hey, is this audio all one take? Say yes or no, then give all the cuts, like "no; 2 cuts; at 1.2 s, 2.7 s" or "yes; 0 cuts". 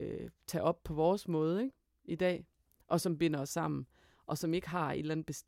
yes; 0 cuts